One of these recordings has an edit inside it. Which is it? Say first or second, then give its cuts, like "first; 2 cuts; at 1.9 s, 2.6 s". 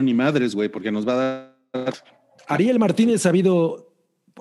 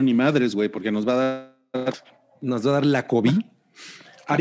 first; 1 cut; at 2.4 s